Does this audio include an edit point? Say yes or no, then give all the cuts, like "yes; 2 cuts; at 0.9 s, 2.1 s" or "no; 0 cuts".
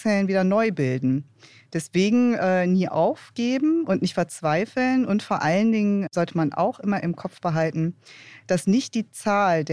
no; 0 cuts